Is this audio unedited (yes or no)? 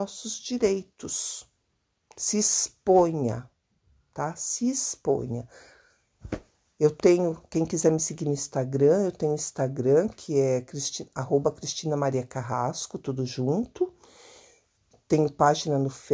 yes